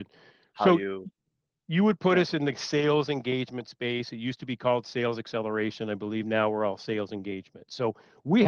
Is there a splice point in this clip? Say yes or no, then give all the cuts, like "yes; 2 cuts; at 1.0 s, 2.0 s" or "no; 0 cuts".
no; 0 cuts